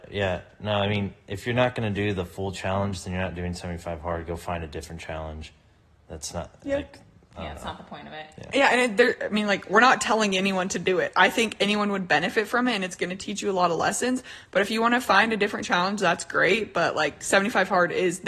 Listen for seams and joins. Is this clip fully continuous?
yes; 0 cuts

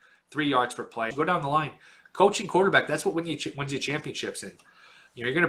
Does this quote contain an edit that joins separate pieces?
yes; 1 cut; at 1.1 s

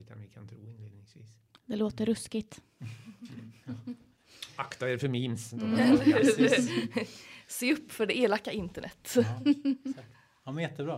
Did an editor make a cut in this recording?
no; 0 cuts

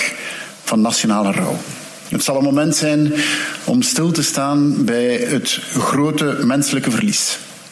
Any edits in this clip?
no; 0 cuts

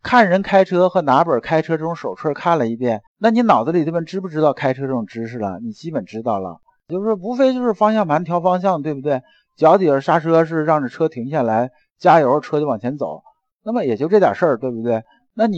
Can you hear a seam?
yes; 1 cut; at 3.1 s

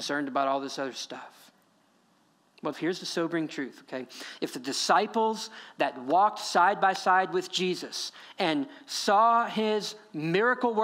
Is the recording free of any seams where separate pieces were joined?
no; 1 cut; at 2.7 s

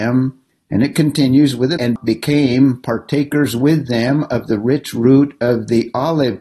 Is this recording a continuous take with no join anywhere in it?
no; 1 cut; at 1.8 s

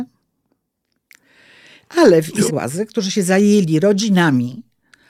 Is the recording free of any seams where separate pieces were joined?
no; 1 cut; at 2.5 s

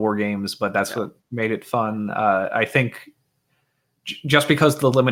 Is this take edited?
no; 0 cuts

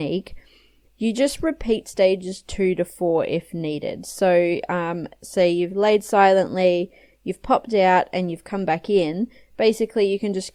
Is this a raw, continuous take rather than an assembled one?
yes; 0 cuts

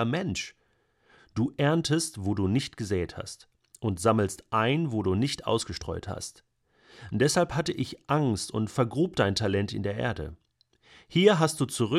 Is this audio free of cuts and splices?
no; 1 cut; at 1.2 s

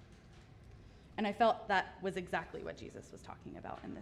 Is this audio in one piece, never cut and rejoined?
no; 1 cut; at 1.1 s

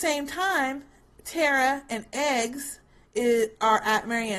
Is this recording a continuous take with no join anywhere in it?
yes; 0 cuts

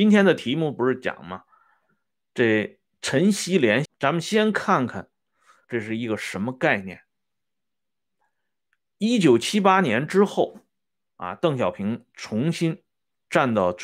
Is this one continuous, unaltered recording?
no; 2 cuts; at 3.9 s, 5.6 s

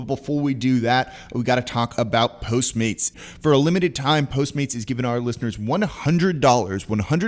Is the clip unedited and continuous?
no; 1 cut; at 3.1 s

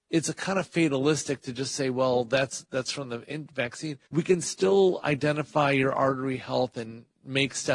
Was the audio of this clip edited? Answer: yes; 1 cut; at 4.1 s

